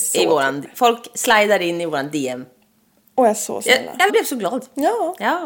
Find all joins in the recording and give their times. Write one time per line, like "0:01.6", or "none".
0:04.1